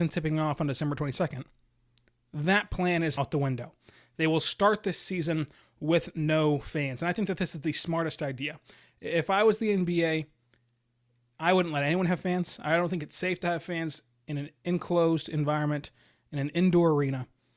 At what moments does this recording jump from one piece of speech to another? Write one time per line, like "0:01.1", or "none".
0:03.2